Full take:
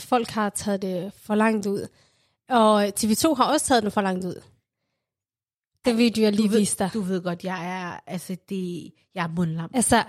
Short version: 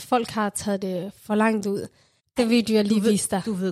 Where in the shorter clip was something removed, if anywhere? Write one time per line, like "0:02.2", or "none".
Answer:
0:02.2